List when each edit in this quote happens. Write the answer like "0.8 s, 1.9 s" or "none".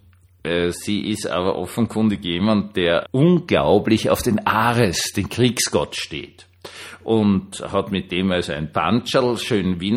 3.0 s